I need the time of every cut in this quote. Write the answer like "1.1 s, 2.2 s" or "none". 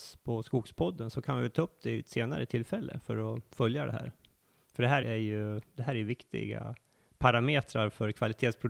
5.0 s